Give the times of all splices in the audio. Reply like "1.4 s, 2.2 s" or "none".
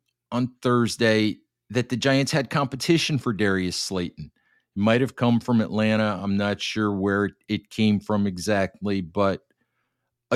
none

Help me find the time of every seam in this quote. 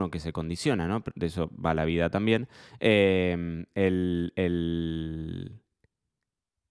1.1 s

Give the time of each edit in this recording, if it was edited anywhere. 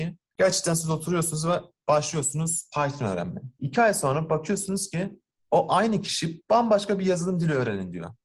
3.6 s

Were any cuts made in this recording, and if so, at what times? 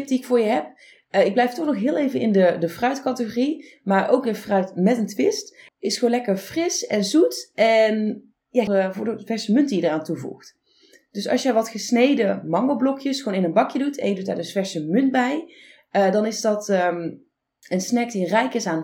5.7 s, 8.7 s

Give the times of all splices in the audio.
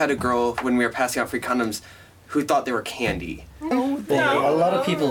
3.7 s

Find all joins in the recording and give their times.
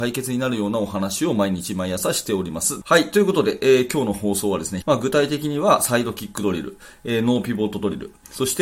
2.8 s, 4.8 s

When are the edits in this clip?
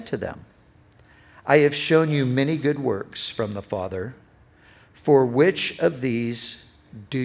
none

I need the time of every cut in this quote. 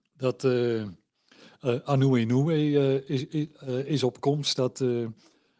none

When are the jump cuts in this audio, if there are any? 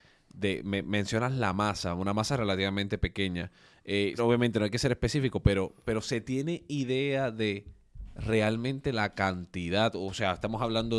4.2 s

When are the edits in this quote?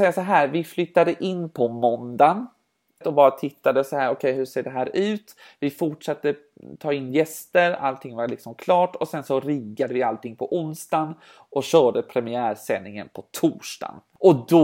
3.0 s

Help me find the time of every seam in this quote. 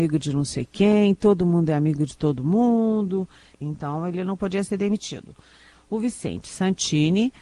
3.5 s, 5.7 s

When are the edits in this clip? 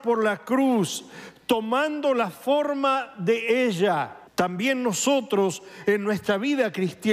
4.3 s

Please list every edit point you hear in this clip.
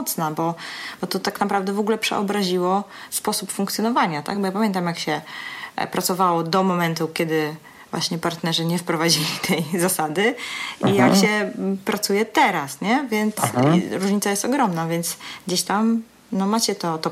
none

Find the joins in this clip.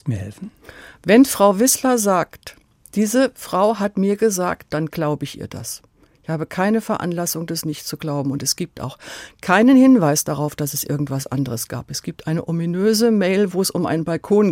4.7 s

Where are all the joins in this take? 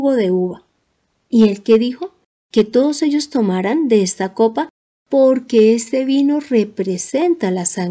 none

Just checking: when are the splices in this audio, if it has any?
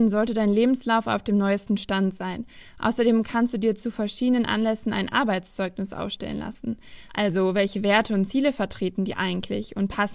7.1 s

